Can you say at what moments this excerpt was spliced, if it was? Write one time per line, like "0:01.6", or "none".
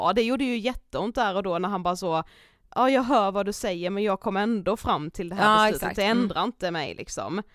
none